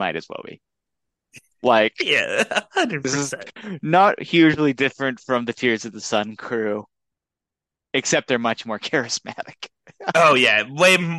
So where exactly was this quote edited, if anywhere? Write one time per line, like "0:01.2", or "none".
none